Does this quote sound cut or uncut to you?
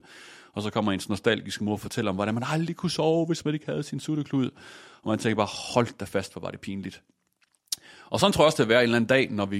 uncut